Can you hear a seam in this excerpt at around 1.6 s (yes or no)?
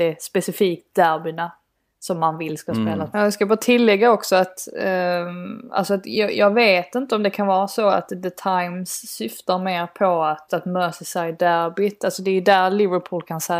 no